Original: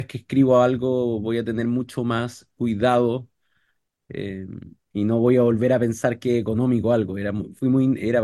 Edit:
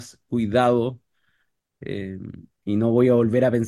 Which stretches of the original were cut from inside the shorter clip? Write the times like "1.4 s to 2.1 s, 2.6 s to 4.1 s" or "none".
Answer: none

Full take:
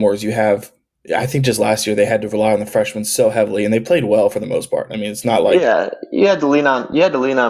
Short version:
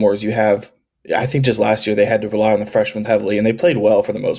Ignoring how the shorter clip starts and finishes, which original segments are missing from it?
3.0 s to 3.3 s

